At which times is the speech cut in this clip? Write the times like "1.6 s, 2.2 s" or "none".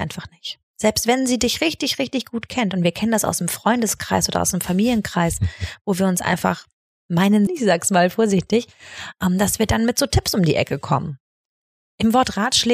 7.5 s